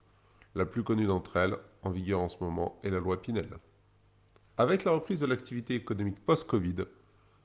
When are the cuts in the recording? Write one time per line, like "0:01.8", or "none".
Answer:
0:04.5